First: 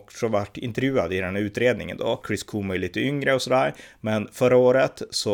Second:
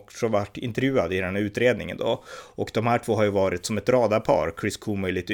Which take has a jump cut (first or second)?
first